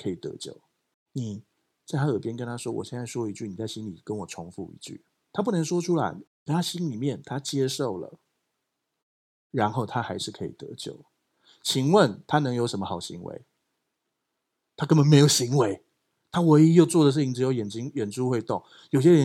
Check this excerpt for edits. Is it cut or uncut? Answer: cut